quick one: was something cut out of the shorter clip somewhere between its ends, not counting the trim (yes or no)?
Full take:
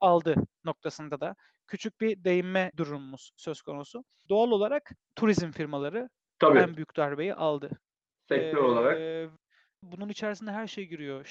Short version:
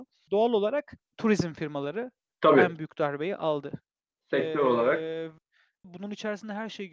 no